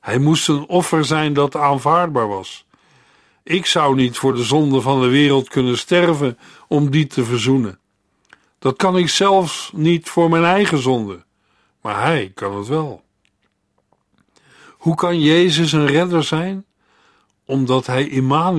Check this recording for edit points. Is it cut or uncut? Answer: uncut